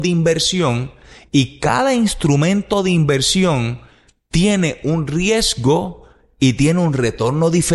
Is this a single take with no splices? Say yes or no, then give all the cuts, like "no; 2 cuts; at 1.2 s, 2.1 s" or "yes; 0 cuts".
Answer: yes; 0 cuts